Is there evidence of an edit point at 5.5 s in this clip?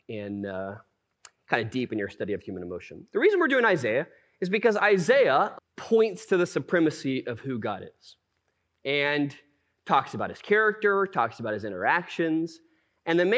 yes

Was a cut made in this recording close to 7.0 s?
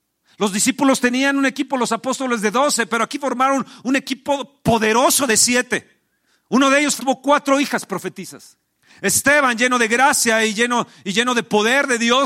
yes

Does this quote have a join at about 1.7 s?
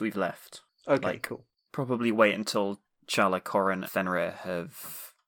yes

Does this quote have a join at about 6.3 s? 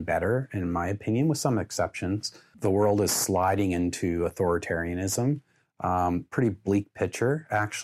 no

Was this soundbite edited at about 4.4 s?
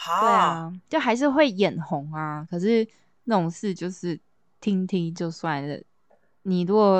no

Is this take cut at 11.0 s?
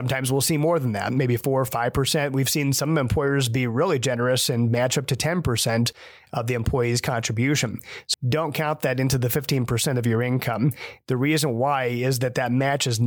no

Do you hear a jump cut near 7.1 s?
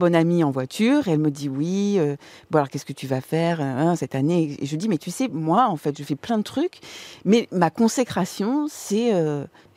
no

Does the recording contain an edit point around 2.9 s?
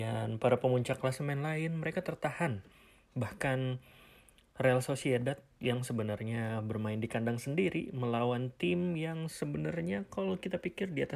no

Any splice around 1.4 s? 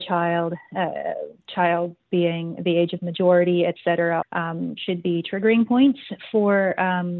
no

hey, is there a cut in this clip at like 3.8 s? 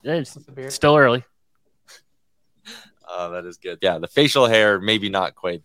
yes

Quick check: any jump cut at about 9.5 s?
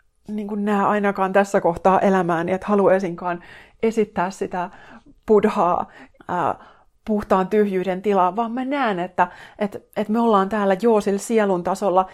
no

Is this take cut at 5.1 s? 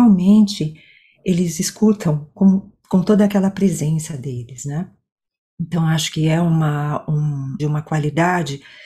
no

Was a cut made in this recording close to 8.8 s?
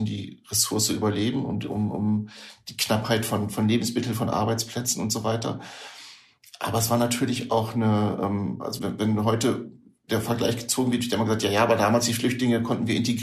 yes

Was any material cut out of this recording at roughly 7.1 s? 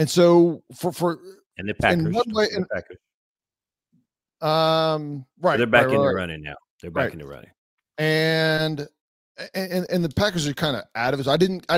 no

